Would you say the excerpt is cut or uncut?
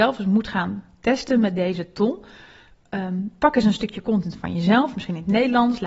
uncut